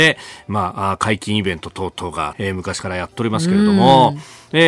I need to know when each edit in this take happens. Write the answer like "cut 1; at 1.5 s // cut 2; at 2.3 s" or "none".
cut 1; at 2.3 s